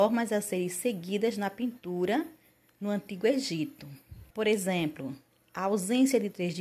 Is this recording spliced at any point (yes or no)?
yes